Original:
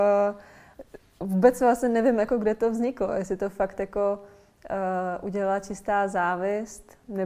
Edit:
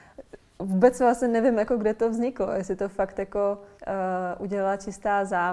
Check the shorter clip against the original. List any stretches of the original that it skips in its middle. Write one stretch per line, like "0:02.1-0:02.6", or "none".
0:04.4-0:04.6